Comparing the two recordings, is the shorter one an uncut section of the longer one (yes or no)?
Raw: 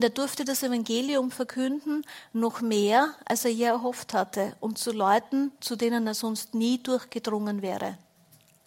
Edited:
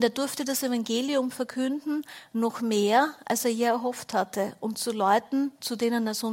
yes